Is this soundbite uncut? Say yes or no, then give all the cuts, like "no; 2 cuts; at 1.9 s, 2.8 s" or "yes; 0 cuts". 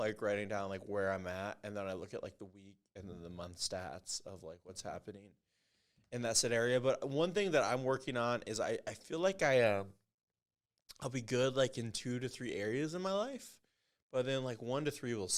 yes; 0 cuts